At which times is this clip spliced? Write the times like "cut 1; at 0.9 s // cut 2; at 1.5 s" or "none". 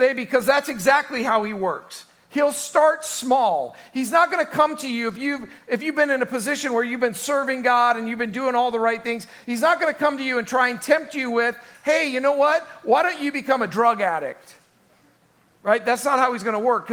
none